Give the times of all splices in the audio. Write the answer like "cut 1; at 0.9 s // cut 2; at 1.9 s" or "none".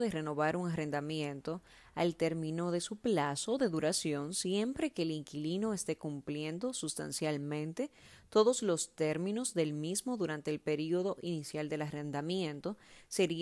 none